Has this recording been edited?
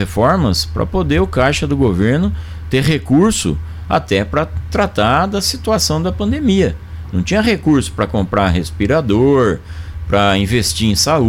no; 0 cuts

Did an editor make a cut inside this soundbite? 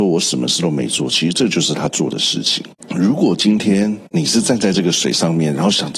no; 0 cuts

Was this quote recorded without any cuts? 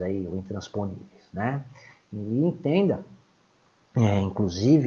yes; 0 cuts

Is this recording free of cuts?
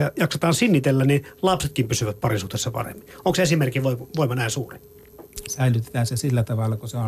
no; 1 cut; at 5.5 s

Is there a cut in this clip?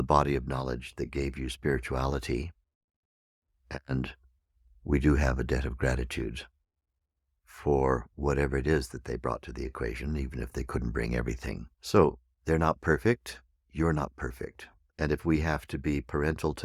yes; 2 cuts; at 11.7 s, 14.9 s

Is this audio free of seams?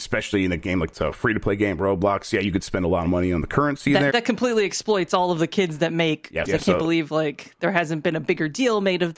no; 2 cuts; at 4.1 s, 6.5 s

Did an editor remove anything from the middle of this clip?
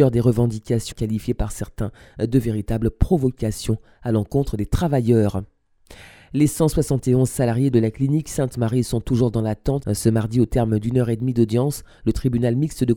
yes; 2 cuts; at 0.9 s, 9.8 s

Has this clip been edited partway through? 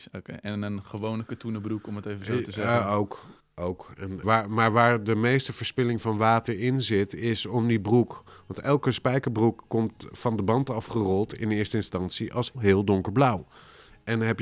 yes; 2 cuts; at 4.2 s, 12.5 s

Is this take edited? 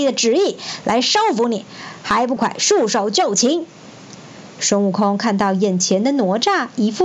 yes; 1 cut; at 2.4 s

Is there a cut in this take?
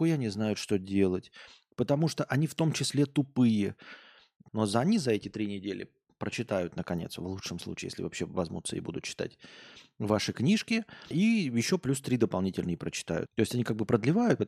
yes; 3 cuts; at 4.5 s, 11.1 s, 13.3 s

